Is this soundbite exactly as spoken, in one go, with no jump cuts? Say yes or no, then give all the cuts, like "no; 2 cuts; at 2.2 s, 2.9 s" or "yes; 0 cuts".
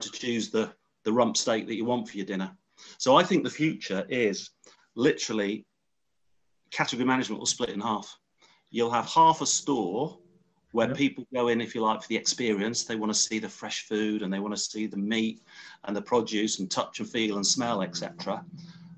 yes; 0 cuts